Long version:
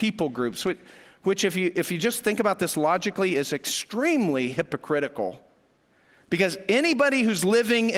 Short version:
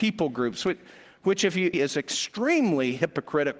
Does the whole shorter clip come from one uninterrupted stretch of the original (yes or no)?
no